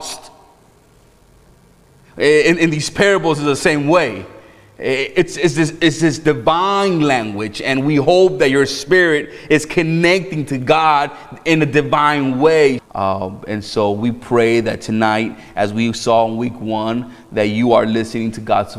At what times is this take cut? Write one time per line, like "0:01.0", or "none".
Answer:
0:12.8